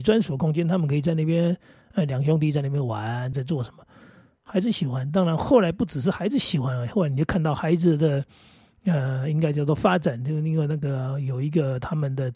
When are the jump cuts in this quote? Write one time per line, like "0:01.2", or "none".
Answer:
0:03.3